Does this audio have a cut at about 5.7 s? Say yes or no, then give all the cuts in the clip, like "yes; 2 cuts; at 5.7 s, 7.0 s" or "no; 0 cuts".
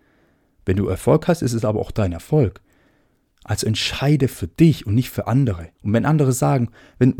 yes; 1 cut; at 5.7 s